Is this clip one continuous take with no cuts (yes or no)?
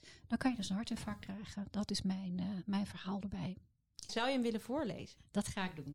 no